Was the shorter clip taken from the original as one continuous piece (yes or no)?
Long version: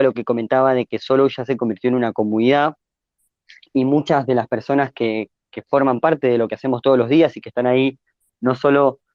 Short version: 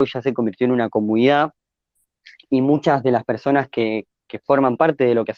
yes